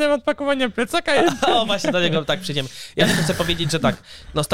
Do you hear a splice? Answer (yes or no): no